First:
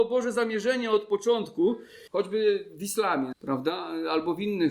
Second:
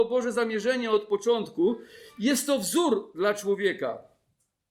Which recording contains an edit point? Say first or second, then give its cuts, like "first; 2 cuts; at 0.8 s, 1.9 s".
first; 2 cuts; at 2.1 s, 3.3 s